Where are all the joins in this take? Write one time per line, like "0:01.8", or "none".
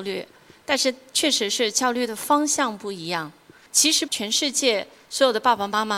0:04.1